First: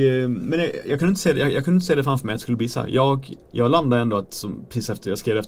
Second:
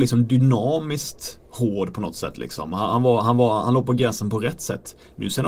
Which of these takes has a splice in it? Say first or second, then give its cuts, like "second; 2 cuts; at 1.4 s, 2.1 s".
first; 1 cut; at 3.5 s